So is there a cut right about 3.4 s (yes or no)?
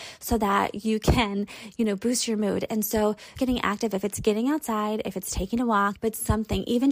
yes